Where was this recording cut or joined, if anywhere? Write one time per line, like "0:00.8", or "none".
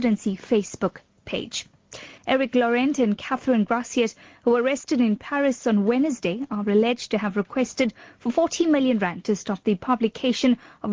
0:02.2